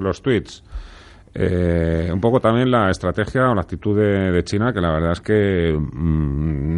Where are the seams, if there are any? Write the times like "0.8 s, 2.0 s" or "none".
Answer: none

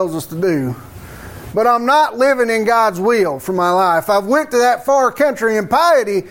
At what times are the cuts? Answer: none

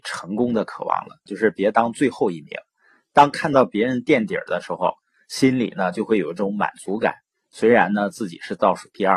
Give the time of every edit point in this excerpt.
1.3 s

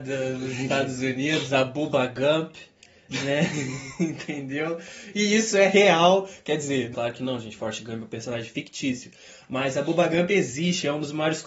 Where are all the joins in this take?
6.9 s

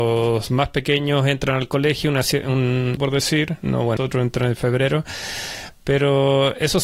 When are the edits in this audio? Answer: 3.0 s, 4.0 s

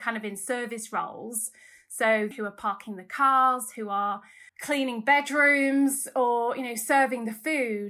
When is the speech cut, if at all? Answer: 2.3 s, 4.5 s

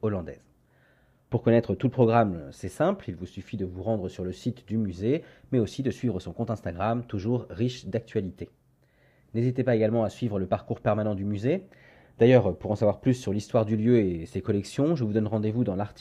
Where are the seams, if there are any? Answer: 1.3 s

